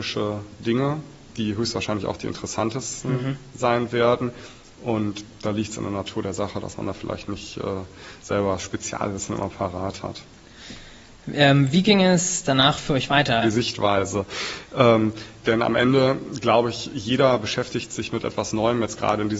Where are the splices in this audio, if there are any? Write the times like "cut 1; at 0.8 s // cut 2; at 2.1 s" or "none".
cut 1; at 13.4 s